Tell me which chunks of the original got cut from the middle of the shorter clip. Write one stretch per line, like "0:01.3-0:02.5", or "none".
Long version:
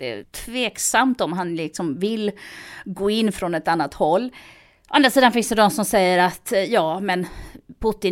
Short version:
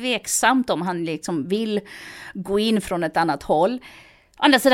none